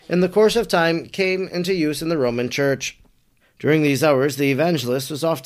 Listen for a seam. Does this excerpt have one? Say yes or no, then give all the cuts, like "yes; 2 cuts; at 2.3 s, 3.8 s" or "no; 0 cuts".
yes; 1 cut; at 3.4 s